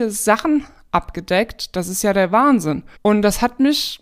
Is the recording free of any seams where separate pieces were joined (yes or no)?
no